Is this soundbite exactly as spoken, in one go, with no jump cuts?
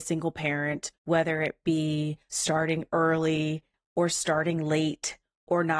no; 2 cuts; at 0.9 s, 2.3 s

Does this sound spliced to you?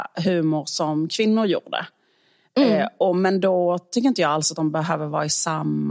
no; 0 cuts

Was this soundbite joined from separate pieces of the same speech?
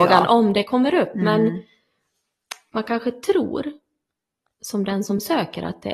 no; 0 cuts

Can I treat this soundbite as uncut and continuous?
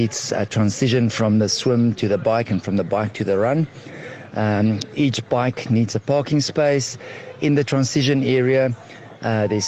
yes; 0 cuts

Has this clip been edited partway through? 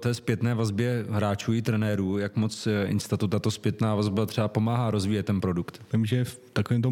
yes; 1 cut; at 5.9 s

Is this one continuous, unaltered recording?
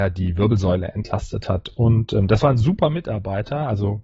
yes; 0 cuts

